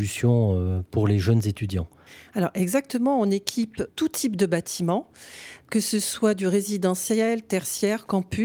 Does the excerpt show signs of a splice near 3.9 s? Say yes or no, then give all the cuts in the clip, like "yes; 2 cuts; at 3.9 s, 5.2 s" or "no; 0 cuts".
yes; 1 cut; at 3.9 s